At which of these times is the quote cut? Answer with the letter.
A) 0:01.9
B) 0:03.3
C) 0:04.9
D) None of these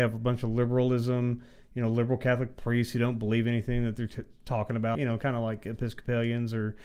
C